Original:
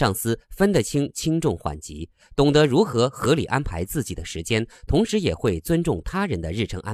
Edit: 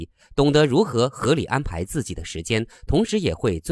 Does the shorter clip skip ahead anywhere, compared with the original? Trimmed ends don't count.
no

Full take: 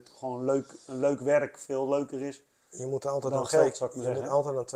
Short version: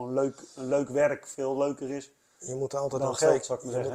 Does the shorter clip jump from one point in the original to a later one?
no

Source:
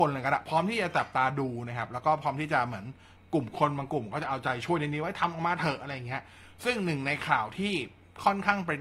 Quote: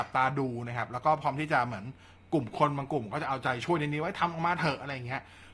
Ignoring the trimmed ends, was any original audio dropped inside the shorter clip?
no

